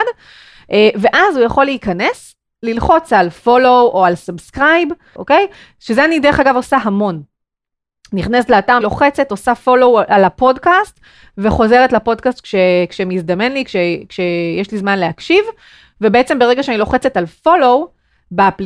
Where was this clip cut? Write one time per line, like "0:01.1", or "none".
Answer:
0:05.2
0:08.8

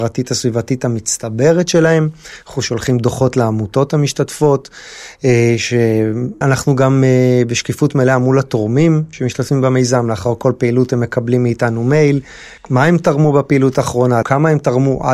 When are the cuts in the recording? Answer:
0:06.4
0:12.6
0:14.2

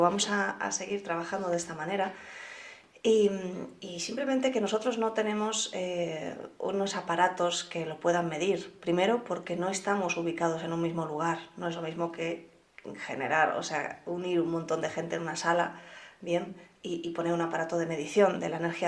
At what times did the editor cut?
none

